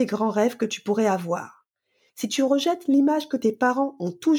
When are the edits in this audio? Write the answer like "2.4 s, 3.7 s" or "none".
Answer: 2.1 s